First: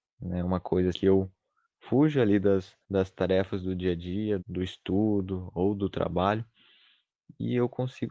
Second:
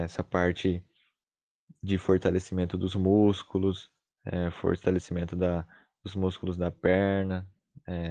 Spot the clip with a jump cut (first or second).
first